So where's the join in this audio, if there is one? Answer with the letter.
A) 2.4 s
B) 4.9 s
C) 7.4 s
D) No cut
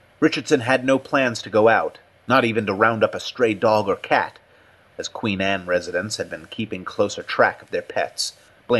B